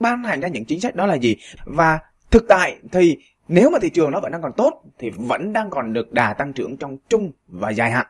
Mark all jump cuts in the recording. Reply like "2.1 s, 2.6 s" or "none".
1.6 s

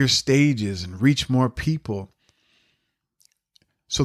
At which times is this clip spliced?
none

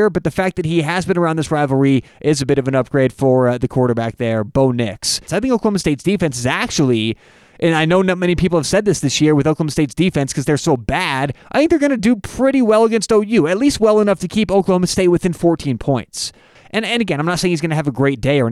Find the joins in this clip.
5.3 s, 16.6 s

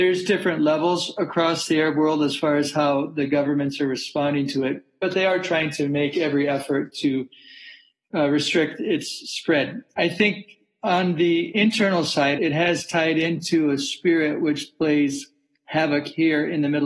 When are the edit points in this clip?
12.4 s

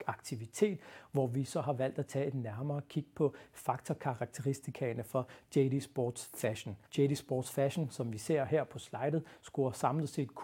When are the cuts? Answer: 6.9 s

